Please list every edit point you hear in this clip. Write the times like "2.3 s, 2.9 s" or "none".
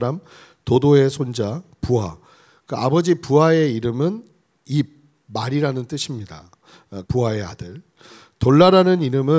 7.1 s